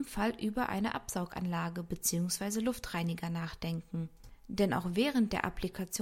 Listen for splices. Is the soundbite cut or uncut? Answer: uncut